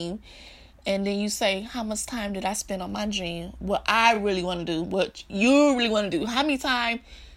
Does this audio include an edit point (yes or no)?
no